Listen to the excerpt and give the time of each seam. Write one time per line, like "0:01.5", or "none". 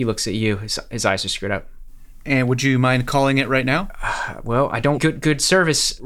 0:05.0